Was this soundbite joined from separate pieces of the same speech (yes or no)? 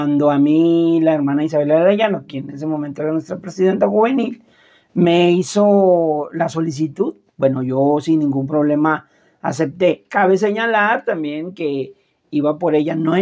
no